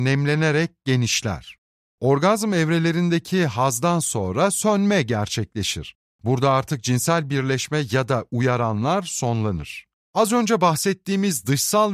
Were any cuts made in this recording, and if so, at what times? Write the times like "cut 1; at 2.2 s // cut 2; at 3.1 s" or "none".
cut 1; at 9.9 s